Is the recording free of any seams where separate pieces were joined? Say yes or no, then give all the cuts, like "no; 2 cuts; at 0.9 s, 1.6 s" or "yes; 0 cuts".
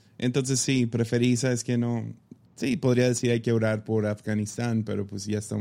no; 1 cut; at 2.4 s